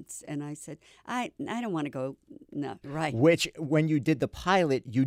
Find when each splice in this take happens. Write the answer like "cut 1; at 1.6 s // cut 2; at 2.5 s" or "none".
cut 1; at 2.8 s